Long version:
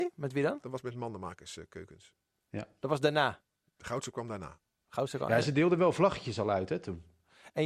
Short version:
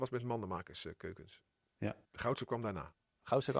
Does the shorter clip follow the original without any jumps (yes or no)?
no